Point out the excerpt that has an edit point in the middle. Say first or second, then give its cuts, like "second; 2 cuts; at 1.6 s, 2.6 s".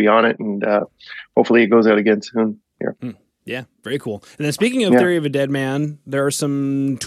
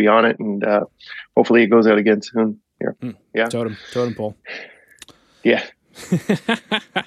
second; 1 cut; at 3.2 s